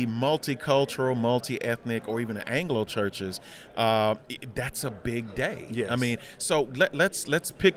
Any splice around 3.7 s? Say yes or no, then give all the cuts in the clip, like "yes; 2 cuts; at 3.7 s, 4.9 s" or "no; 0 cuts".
no; 0 cuts